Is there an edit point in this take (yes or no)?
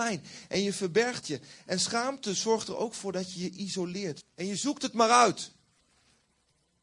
yes